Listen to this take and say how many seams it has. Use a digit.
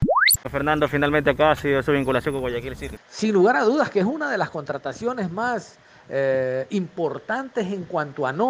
1